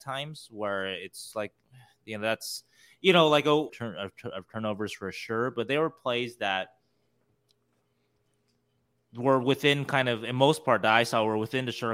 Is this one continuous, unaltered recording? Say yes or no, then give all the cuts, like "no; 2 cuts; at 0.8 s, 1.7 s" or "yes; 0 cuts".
no; 1 cut; at 3.7 s